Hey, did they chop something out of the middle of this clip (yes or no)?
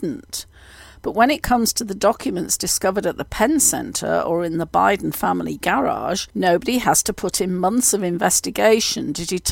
yes